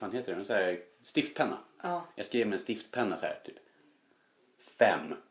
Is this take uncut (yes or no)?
yes